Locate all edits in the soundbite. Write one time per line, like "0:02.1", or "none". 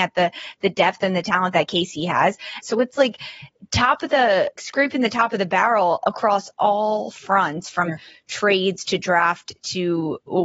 0:02.6
0:04.6